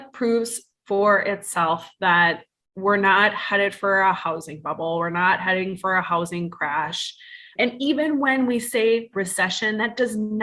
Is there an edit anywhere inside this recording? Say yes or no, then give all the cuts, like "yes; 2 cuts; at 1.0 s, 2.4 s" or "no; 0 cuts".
yes; 1 cut; at 7.6 s